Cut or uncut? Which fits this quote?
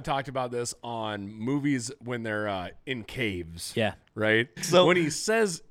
cut